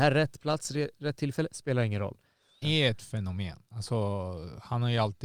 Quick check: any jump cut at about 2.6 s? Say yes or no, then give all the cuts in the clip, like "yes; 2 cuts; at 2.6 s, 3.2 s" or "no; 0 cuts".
yes; 1 cut; at 2.6 s